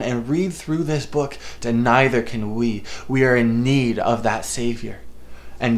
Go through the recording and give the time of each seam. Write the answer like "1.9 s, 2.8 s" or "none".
1.6 s